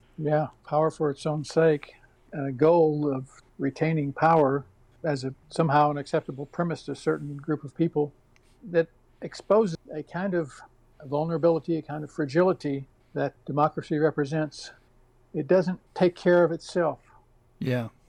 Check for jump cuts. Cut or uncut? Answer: cut